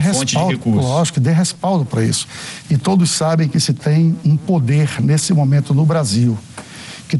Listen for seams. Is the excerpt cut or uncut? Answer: cut